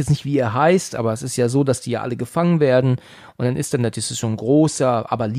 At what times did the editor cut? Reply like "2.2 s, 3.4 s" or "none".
none